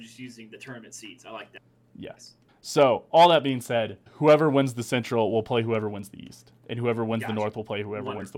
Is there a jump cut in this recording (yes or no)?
yes